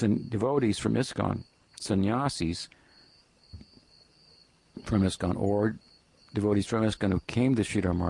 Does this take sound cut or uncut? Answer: cut